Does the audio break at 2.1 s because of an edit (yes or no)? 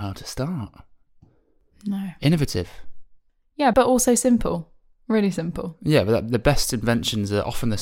no